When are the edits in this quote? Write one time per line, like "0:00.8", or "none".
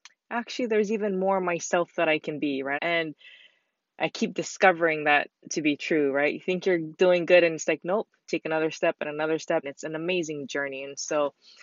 0:02.7
0:09.6